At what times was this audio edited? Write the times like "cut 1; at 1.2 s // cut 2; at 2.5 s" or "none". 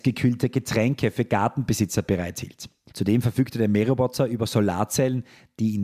cut 1; at 2.9 s